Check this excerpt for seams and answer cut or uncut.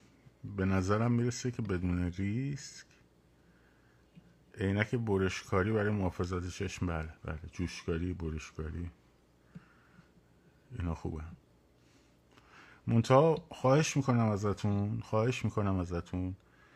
cut